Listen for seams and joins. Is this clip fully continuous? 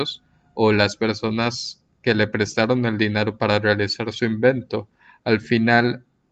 yes; 0 cuts

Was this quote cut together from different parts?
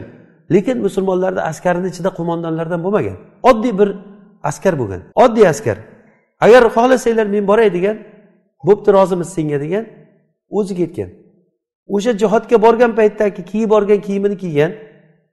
yes; 1 cut; at 5.1 s

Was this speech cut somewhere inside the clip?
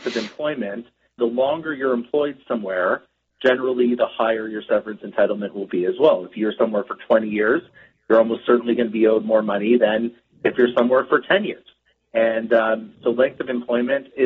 yes; 1 cut; at 1.2 s

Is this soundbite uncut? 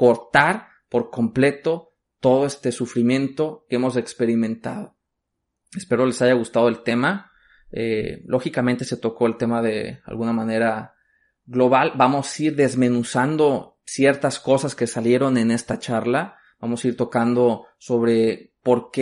no; 1 cut; at 5.6 s

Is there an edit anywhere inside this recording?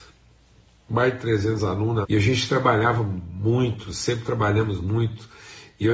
yes; 1 cut; at 2.0 s

